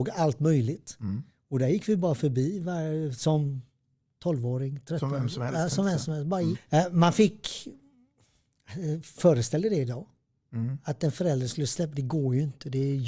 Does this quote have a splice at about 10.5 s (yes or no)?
no